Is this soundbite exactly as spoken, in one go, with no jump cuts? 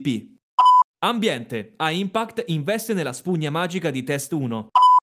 no; 1 cut; at 0.9 s

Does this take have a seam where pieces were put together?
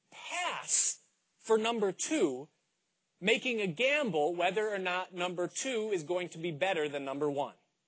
no; 0 cuts

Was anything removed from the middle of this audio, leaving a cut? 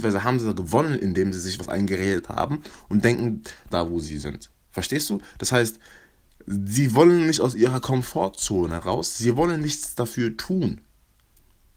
yes; 1 cut; at 3.7 s

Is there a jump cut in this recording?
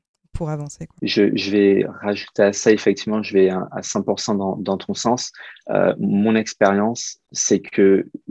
no; 0 cuts

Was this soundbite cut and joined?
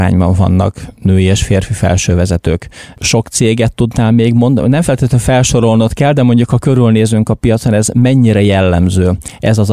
no; 0 cuts

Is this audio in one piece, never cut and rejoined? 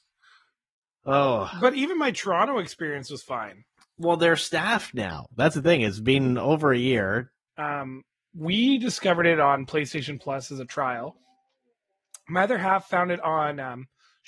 no; 1 cut; at 7.5 s

